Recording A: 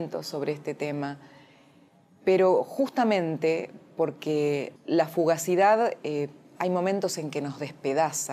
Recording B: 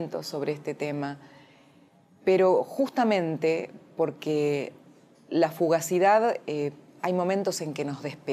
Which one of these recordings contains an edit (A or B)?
A